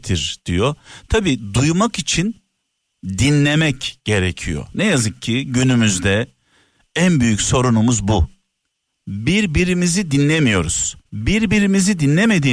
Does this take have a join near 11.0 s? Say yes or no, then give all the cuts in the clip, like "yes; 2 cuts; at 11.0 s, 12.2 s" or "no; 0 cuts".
yes; 1 cut; at 11.0 s